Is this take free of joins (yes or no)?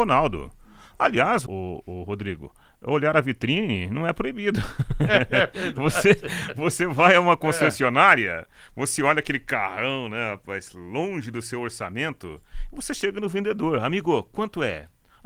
no